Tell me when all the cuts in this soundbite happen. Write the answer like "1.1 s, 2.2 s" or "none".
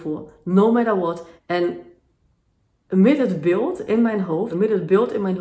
1.4 s, 4.5 s